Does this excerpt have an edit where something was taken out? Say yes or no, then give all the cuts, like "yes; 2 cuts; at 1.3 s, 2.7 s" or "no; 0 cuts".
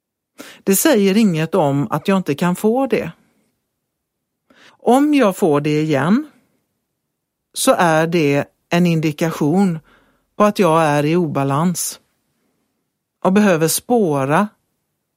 yes; 1 cut; at 4.7 s